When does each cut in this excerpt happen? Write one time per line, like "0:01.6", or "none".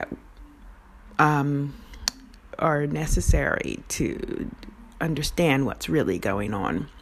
0:02.5